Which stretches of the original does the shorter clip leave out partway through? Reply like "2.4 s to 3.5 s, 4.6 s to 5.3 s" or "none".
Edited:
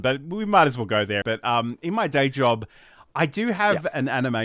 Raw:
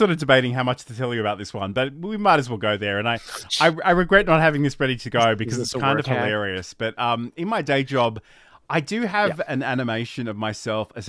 2.9 s to 6.8 s